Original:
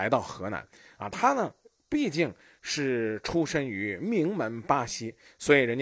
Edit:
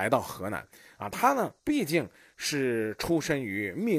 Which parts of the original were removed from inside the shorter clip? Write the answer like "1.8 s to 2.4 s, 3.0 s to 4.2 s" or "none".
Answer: 1.6 s to 1.8 s